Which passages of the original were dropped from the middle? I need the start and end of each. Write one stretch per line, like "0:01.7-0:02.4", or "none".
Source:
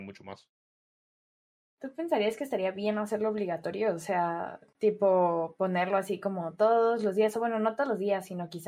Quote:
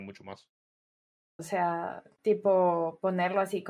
0:01.4-0:04.0